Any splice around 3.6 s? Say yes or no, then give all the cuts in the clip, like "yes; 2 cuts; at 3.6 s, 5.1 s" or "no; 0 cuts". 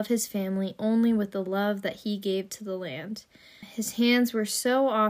yes; 1 cut; at 3.6 s